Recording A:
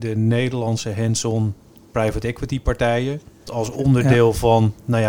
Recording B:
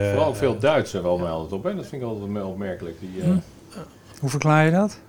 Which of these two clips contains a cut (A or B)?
A